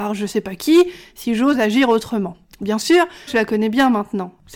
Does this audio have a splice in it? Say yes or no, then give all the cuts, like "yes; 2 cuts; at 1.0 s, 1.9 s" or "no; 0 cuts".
yes; 1 cut; at 3.3 s